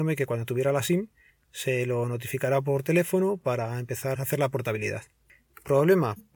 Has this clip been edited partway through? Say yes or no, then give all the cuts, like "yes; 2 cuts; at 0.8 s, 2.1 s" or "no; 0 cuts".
yes; 1 cut; at 4.1 s